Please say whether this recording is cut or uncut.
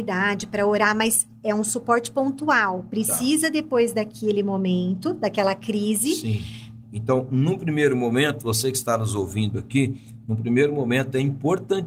cut